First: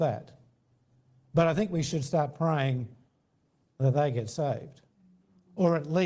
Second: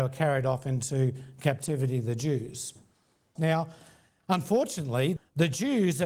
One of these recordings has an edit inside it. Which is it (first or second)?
second